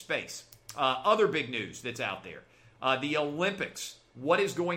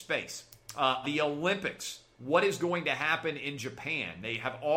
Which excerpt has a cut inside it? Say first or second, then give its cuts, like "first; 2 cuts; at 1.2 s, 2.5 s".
second; 1 cut; at 1.0 s